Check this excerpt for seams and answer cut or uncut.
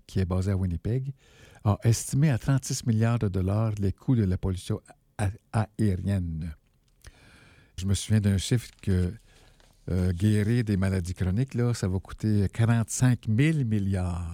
cut